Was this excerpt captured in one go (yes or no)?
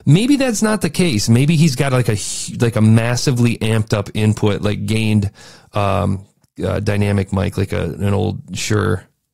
yes